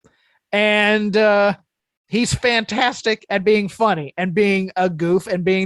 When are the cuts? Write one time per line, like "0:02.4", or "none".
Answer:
none